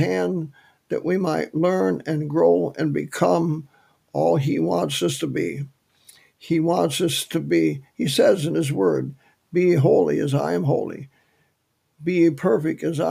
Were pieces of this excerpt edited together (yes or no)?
no